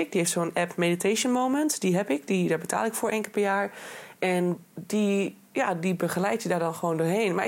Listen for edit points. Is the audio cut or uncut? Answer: uncut